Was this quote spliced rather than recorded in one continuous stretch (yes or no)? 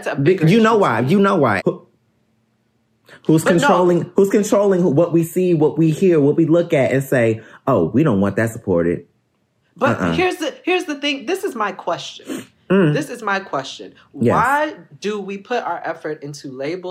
yes